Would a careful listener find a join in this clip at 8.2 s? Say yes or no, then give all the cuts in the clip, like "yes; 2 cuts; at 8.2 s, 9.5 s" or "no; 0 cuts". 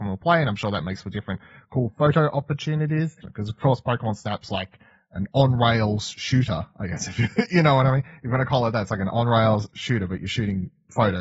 no; 1 cut; at 3.2 s